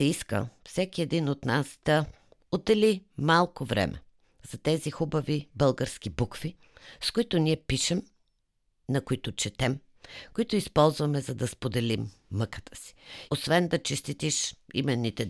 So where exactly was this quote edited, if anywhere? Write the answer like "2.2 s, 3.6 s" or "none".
10.3 s, 13.3 s